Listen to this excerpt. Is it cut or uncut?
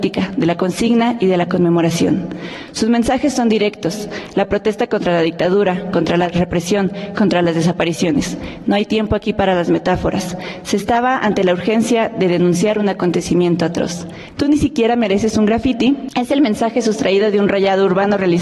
uncut